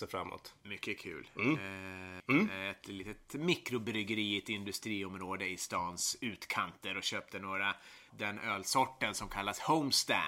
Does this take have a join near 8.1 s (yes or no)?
yes